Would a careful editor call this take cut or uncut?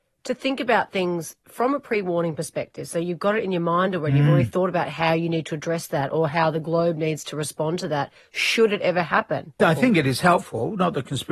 cut